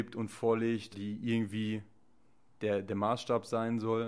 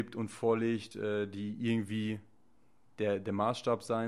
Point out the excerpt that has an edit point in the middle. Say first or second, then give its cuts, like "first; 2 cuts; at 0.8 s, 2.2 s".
first; 1 cut; at 0.9 s